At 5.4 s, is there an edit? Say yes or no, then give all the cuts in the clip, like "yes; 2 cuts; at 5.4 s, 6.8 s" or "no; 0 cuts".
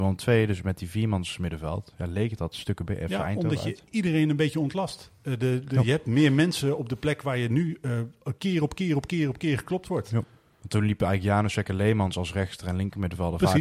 no; 0 cuts